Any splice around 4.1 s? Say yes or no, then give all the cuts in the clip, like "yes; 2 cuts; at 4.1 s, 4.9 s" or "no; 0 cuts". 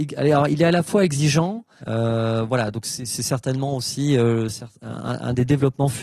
no; 1 cut; at 1.8 s